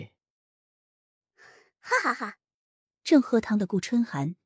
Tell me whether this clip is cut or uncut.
uncut